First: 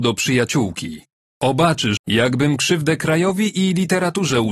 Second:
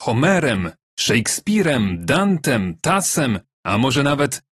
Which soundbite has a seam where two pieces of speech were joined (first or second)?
first